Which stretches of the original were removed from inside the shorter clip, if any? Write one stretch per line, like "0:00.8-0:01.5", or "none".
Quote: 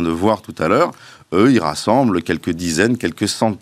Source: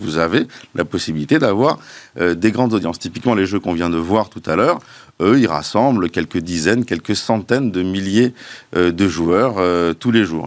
none